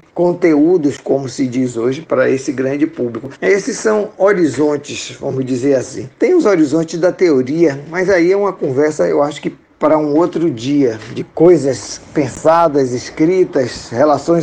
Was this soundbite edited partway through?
no; 0 cuts

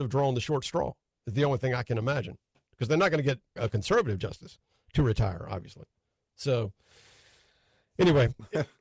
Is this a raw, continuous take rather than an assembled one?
no; 1 cut; at 3.6 s

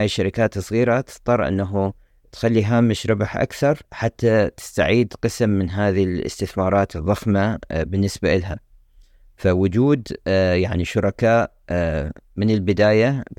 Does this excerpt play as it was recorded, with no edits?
no; 1 cut; at 3.8 s

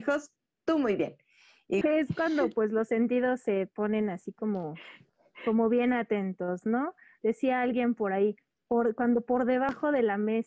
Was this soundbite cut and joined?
yes; 1 cut; at 1.8 s

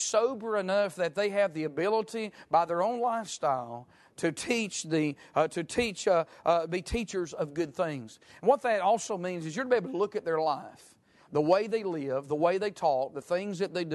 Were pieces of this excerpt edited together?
no; 0 cuts

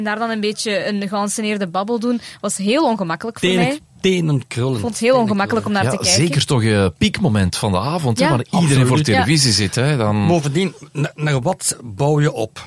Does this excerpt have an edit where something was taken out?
no; 0 cuts

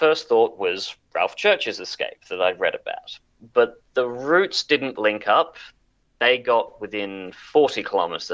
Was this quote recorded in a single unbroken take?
no; 1 cut; at 5.0 s

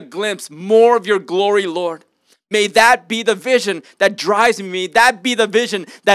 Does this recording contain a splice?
no; 0 cuts

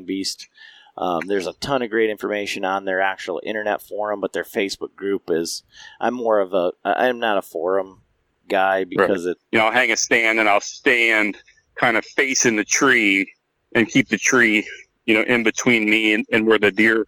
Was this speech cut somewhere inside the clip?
yes; 1 cut; at 9.4 s

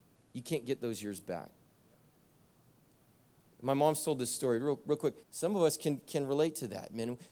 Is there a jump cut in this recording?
yes; 1 cut; at 5.2 s

